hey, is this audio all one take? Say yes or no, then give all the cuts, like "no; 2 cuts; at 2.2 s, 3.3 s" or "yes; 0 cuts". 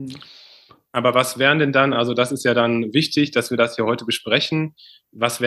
yes; 0 cuts